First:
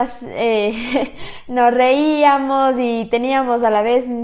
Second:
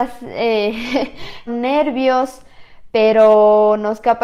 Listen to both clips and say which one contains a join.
second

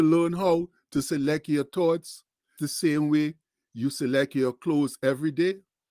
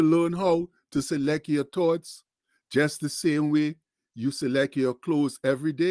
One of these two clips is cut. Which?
first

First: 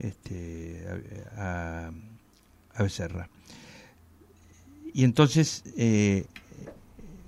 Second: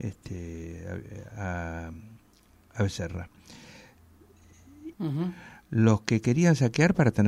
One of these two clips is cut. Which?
second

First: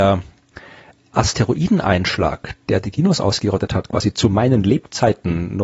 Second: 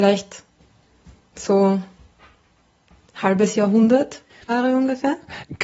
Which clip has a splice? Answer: second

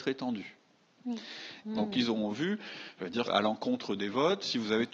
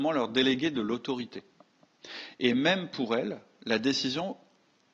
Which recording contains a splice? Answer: first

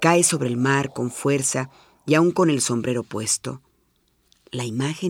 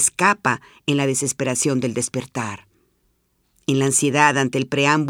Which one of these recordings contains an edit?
second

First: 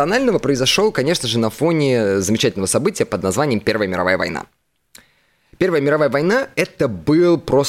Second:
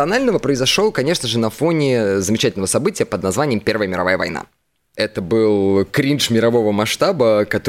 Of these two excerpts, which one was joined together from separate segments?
second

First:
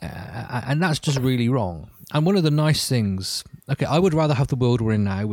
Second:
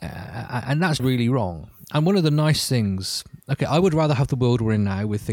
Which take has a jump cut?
second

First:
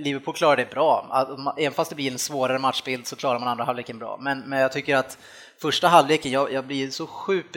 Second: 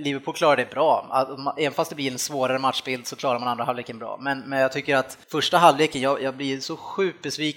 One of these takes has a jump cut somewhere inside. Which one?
second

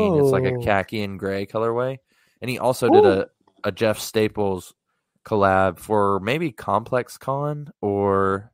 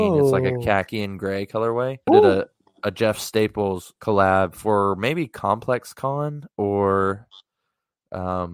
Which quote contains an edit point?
second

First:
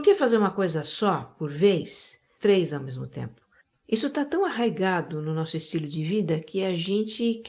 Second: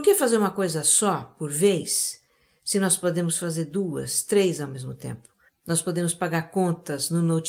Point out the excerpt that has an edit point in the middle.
first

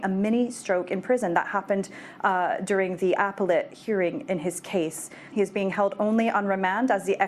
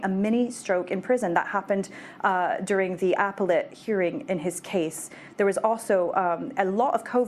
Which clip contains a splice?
first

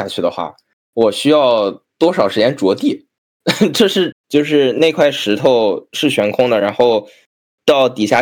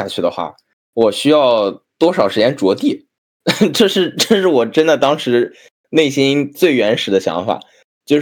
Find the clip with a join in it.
first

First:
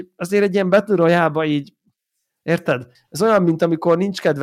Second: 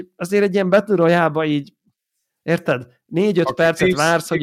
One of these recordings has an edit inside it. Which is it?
first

